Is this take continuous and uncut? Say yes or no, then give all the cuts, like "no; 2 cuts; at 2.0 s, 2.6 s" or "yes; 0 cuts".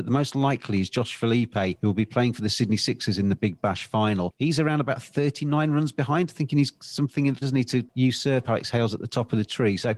no; 1 cut; at 7.4 s